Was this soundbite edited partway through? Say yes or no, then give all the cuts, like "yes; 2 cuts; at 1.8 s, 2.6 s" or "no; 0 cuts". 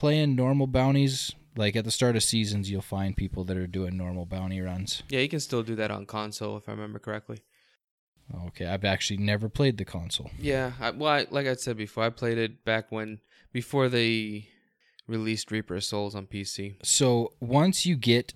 no; 0 cuts